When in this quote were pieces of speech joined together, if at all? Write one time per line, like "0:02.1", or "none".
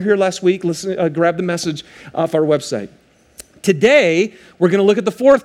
none